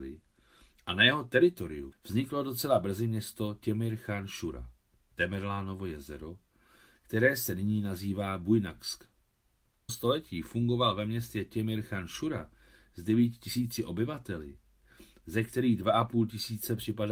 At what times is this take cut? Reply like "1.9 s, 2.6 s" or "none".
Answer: 1.9 s, 9.9 s